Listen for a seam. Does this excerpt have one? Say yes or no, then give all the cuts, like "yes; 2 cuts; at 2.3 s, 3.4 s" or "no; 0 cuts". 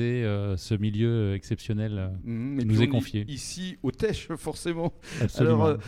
no; 0 cuts